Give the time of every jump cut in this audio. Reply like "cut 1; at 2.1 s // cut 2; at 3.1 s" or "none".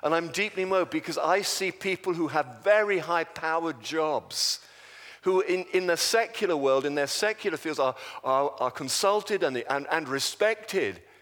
none

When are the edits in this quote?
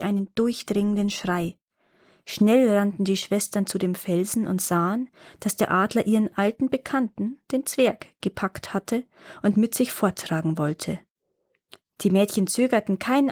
none

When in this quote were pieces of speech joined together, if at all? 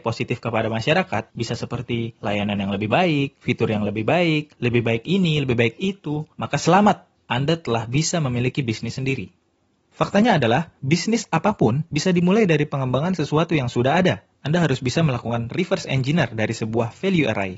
cut 1; at 9.8 s

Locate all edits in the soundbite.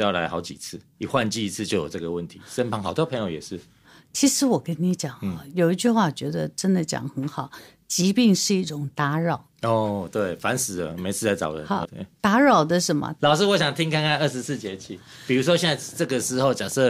cut 1; at 11.8 s // cut 2; at 13.2 s

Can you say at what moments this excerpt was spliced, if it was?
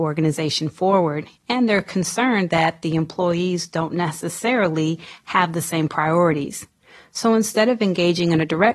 none

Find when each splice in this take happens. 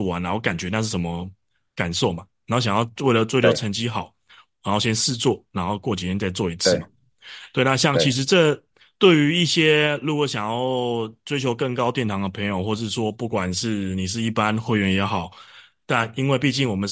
none

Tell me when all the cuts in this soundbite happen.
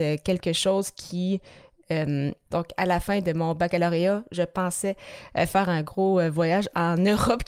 cut 1; at 2.5 s

